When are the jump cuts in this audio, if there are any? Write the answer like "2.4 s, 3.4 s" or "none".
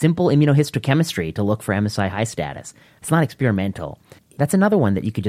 3.0 s, 4.2 s